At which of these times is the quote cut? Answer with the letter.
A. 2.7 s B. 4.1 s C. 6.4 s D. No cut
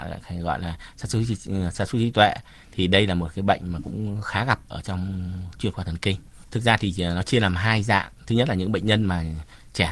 C